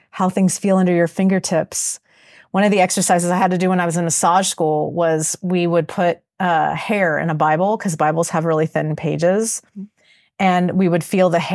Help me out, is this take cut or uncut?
uncut